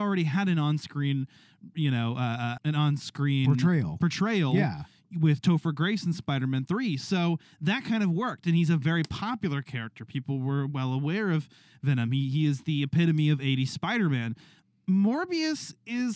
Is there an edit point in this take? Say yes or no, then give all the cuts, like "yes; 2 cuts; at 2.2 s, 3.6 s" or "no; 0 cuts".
yes; 1 cut; at 2.6 s